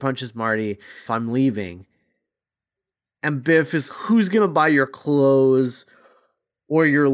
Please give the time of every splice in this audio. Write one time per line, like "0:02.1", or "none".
0:01.1
0:03.9